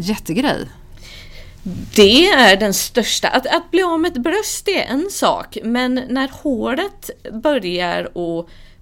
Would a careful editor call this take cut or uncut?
uncut